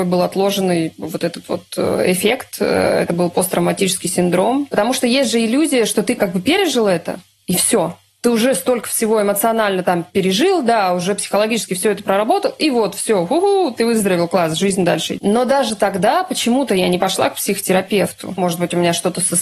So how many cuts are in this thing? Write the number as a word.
two